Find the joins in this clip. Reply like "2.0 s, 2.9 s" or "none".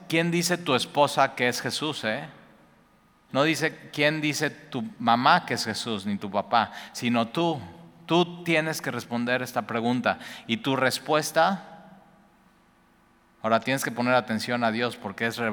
3.3 s